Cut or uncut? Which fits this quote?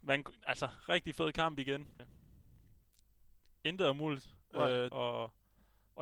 cut